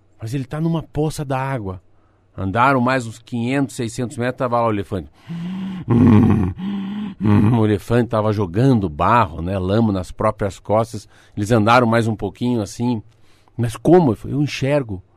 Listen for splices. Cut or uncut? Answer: uncut